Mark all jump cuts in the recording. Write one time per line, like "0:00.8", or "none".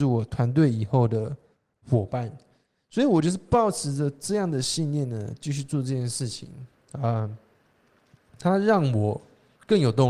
none